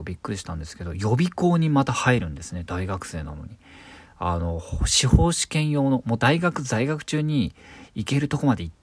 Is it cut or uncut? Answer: uncut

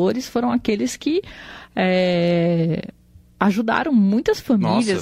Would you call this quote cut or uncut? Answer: uncut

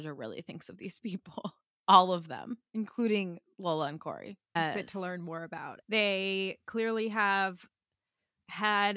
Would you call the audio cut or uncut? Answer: cut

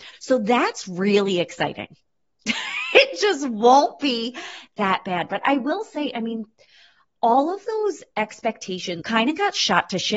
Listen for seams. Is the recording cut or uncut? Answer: cut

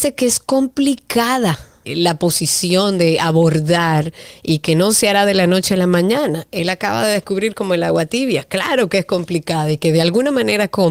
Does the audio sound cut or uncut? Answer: cut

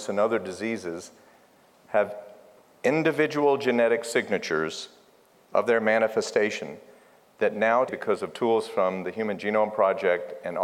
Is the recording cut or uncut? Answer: cut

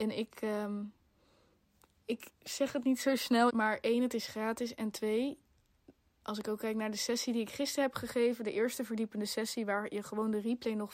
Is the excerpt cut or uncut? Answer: cut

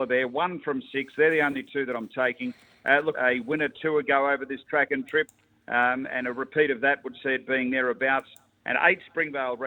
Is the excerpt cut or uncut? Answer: cut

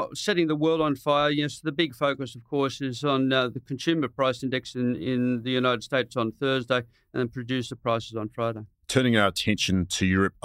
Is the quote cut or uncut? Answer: uncut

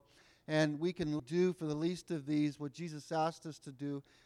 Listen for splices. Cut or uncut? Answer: cut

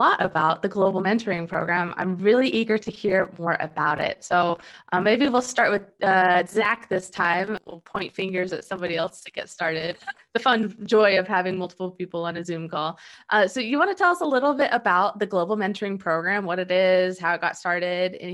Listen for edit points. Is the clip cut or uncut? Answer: uncut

